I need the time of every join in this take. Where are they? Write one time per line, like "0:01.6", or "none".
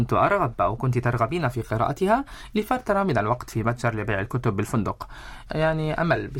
0:05.5

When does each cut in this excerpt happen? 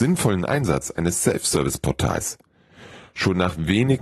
none

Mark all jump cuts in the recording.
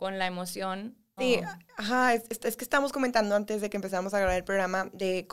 0:01.2

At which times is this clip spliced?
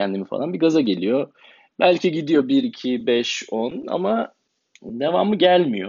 none

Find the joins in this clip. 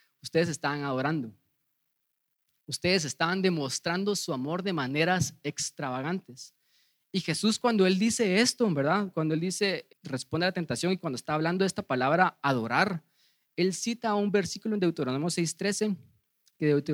0:09.9

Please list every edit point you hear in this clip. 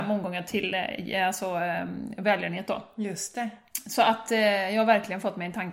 none

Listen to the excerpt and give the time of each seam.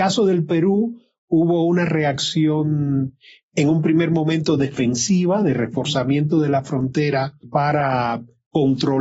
0:07.4

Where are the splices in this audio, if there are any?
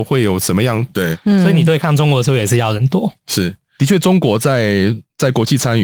0:00.9

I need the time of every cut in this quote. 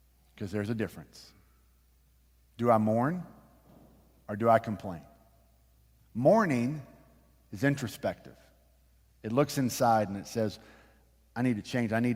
none

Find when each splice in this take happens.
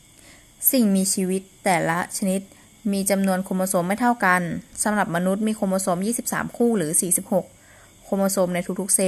none

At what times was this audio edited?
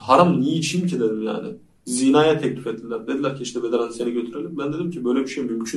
none

